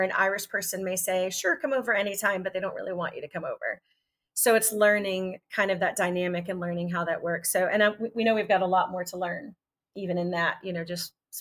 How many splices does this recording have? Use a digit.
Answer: 0